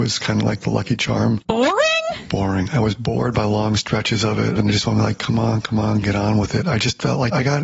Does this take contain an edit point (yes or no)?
yes